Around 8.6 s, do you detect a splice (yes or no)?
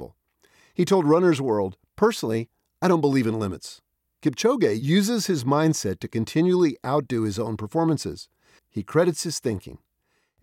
yes